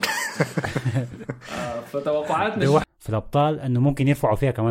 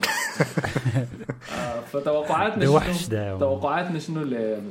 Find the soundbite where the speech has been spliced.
first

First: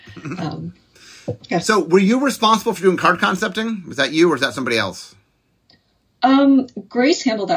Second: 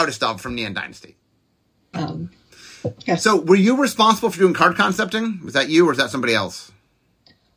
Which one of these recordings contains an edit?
second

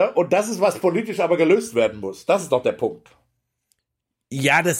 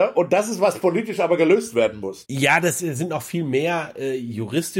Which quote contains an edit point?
second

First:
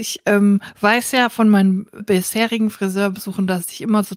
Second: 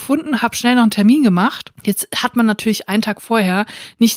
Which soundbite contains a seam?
first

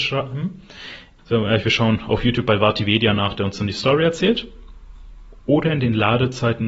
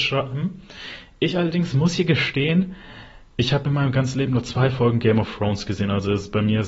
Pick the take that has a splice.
first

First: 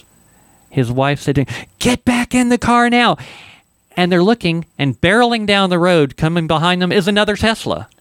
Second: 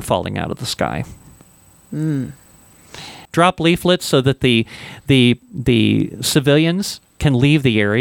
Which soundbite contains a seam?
second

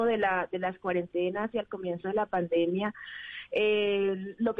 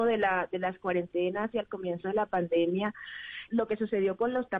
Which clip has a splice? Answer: second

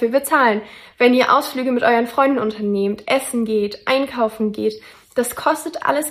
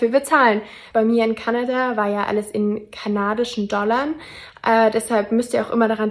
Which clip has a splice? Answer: second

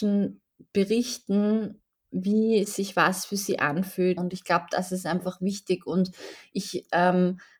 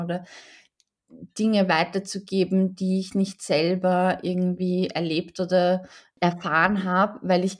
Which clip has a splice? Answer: first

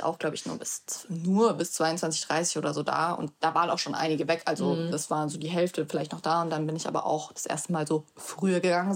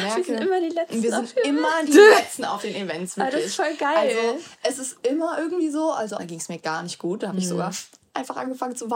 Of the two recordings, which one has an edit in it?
second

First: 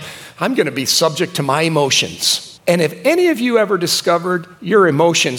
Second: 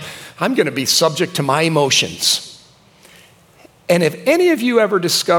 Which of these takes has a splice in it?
first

